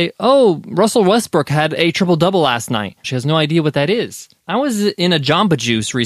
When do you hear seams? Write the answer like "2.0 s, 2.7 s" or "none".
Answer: 3.0 s, 4.4 s